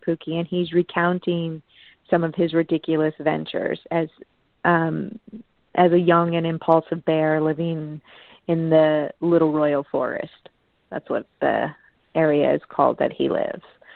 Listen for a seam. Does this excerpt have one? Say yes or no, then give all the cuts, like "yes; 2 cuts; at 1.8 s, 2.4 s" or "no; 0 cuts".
no; 0 cuts